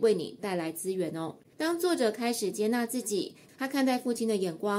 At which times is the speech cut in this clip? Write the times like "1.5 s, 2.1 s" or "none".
1.5 s, 3.5 s

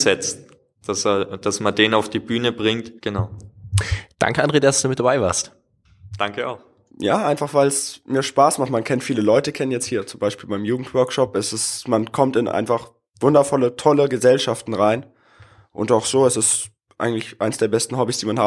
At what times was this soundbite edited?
3.0 s, 6.9 s

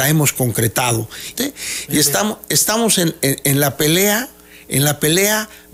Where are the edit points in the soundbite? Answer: 1.3 s

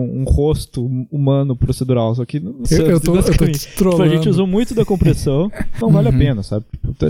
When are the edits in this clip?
2.6 s, 5.8 s

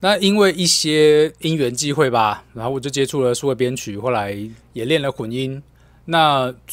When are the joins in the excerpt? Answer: none

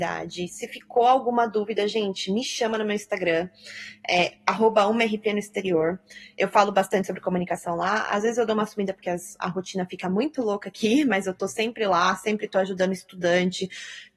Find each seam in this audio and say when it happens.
9.4 s

